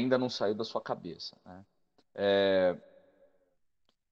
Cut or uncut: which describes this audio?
uncut